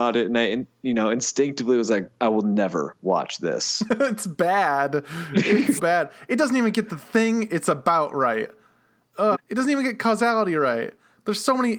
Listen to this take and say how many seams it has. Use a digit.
2